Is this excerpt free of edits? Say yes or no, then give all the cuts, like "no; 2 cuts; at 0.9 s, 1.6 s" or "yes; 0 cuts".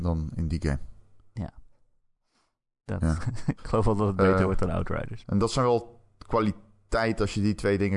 no; 2 cuts; at 3.2 s, 5.2 s